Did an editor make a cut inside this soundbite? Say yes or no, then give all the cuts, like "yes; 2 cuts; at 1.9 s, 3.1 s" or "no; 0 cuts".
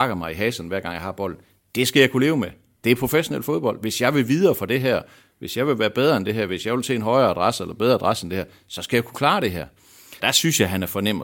yes; 1 cut; at 10.2 s